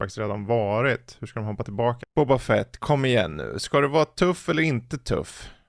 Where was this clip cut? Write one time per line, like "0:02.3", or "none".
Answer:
0:02.0